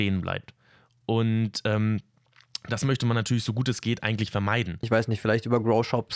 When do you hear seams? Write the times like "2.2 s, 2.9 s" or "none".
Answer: 4.8 s